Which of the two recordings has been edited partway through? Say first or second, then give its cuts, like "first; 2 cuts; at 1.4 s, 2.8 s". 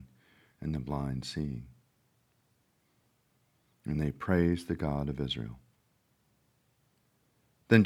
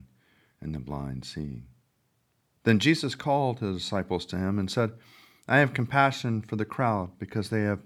second; 1 cut; at 2.5 s